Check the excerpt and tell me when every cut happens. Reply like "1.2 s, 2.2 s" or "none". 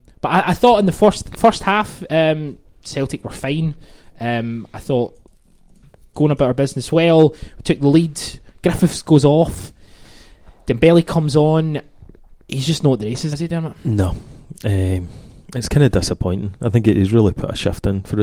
13.3 s

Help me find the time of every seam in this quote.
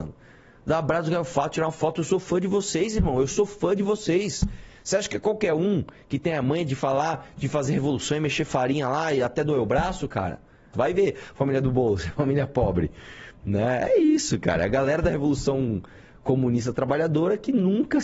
10.7 s

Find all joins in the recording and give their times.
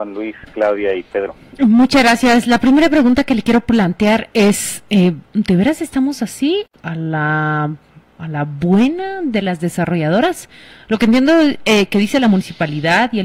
6.7 s

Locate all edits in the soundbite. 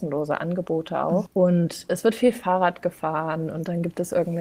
1.3 s

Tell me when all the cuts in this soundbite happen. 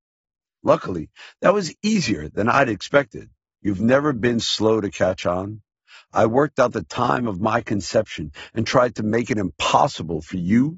3.5 s

